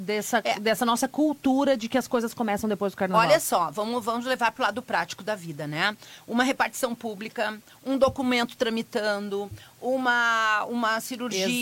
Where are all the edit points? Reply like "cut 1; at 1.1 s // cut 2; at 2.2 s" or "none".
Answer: none